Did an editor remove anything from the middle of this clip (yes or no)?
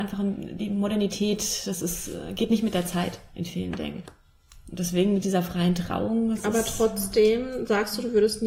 no